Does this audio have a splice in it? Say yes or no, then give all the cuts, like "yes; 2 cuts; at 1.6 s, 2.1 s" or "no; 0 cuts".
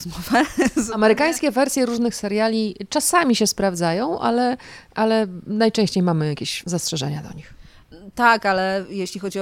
yes; 1 cut; at 6.6 s